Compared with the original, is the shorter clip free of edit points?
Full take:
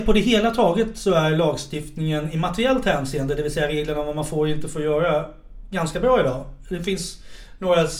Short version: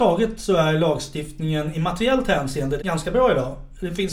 no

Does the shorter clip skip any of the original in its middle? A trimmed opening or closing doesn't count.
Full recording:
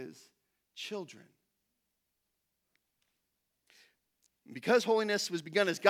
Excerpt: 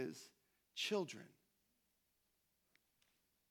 no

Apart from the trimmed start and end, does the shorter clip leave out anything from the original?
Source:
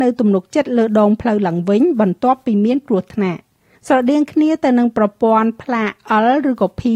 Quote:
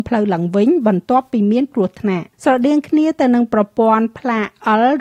yes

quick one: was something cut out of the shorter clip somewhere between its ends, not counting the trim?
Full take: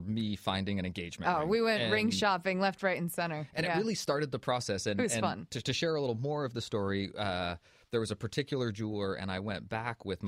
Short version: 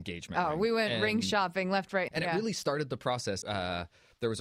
yes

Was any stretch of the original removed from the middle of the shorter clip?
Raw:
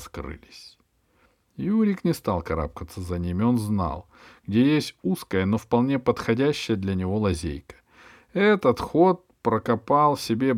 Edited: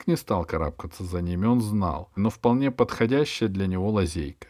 yes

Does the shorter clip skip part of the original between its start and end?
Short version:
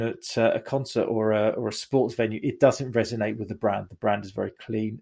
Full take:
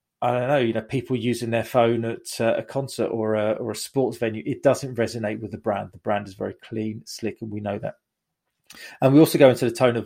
no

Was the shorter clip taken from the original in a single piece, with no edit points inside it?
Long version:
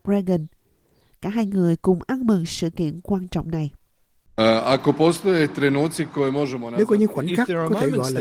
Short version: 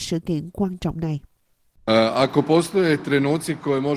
yes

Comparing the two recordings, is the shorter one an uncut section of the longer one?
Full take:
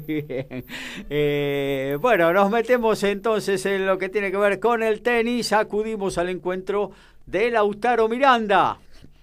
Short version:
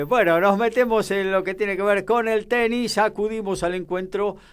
no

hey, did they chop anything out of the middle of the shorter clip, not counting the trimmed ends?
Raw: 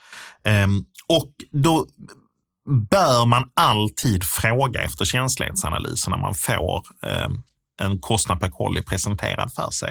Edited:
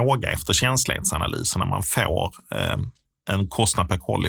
no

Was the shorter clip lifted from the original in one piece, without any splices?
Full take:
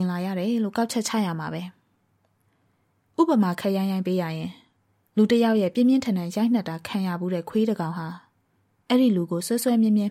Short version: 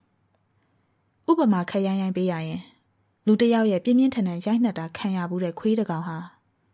yes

